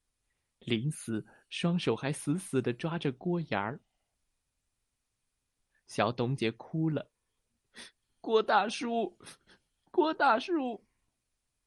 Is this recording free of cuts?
no; 1 cut; at 6.4 s

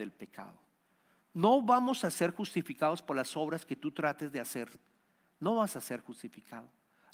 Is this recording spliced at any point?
no; 0 cuts

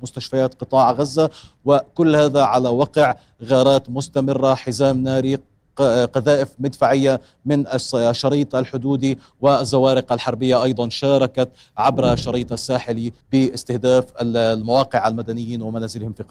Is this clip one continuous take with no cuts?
no; 1 cut; at 13.2 s

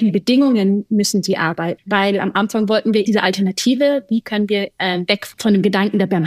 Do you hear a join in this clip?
yes; 2 cuts; at 1.8 s, 3.0 s

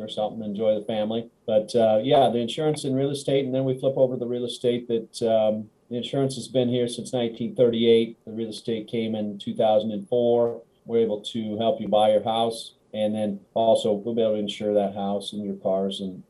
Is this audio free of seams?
no; 1 cut; at 1.4 s

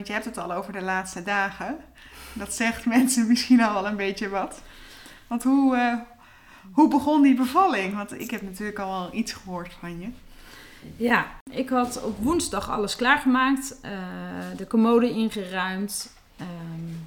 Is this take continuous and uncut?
yes; 0 cuts

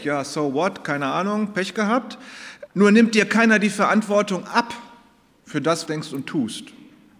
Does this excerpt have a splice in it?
yes; 2 cuts; at 2.7 s, 5.9 s

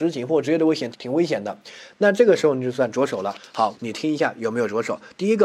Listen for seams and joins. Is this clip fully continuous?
no; 2 cuts; at 0.9 s, 3.7 s

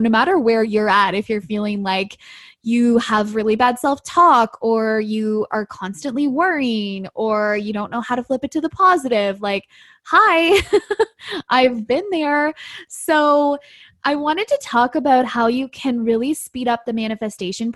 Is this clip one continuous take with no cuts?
yes; 0 cuts

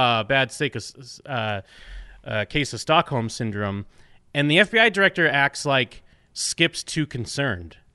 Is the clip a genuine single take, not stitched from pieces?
yes; 0 cuts

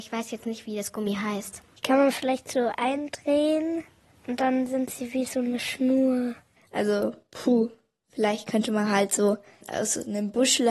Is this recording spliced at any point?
no; 0 cuts

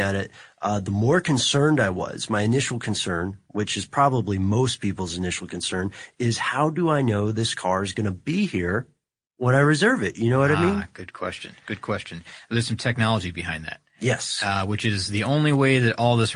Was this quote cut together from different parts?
no; 0 cuts

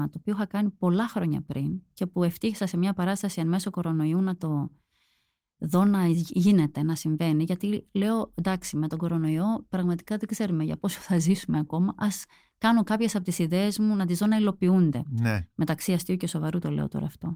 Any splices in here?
no; 0 cuts

